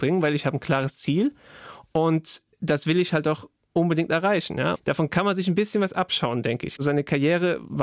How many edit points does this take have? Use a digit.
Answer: 2